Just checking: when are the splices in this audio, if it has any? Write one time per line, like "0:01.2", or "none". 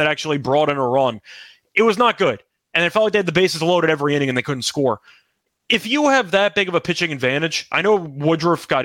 none